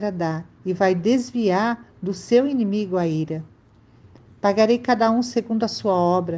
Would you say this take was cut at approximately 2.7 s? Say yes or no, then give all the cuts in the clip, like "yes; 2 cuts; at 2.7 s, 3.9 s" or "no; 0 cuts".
no; 1 cut; at 4.3 s